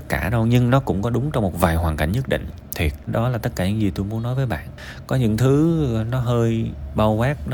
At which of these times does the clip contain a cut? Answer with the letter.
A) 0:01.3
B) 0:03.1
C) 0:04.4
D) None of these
B